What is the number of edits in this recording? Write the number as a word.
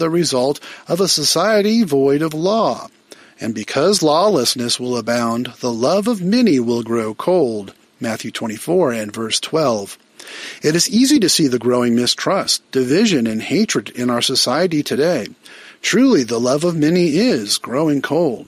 zero